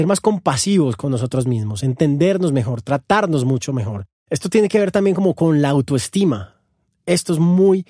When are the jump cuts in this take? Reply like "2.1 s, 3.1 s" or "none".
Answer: none